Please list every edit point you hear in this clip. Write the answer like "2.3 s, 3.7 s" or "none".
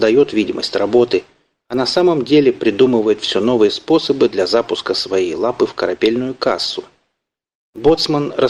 none